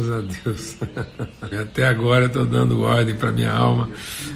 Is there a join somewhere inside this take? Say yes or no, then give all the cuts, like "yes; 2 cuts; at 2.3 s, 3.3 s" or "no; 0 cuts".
yes; 1 cut; at 1.5 s